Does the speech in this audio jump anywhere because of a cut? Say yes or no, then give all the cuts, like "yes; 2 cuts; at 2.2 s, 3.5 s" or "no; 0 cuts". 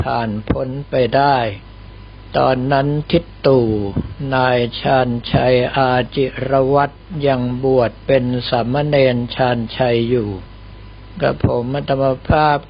no; 0 cuts